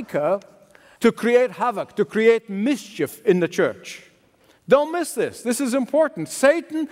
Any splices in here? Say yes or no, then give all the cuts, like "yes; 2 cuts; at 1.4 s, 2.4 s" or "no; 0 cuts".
yes; 1 cut; at 4.6 s